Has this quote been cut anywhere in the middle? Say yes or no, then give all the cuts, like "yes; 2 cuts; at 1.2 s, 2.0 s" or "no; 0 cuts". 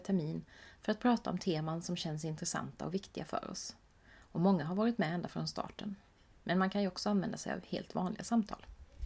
yes; 1 cut; at 6.3 s